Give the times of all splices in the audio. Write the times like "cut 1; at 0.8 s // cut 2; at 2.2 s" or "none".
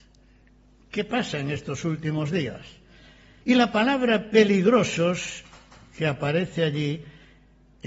cut 1; at 3.4 s